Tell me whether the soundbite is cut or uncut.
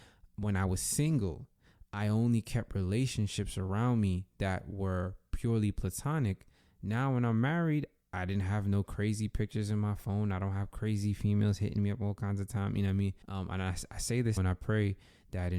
cut